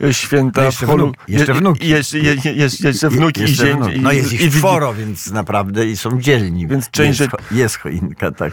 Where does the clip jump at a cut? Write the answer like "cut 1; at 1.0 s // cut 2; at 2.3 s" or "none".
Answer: cut 1; at 3.9 s // cut 2; at 6.7 s